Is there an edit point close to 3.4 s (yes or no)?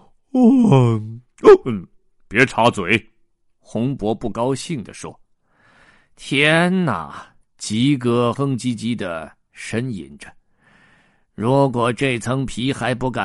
no